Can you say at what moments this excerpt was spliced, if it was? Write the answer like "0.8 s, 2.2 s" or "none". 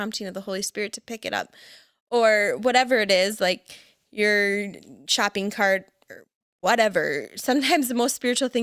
none